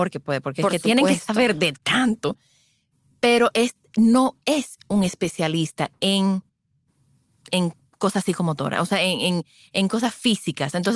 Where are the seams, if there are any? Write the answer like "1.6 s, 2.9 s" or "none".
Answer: none